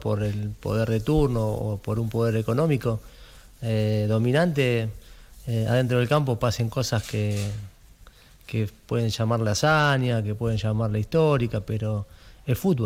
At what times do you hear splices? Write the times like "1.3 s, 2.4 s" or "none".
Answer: none